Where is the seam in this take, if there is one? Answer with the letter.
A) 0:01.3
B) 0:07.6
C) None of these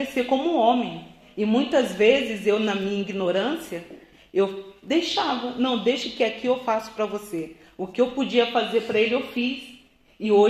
C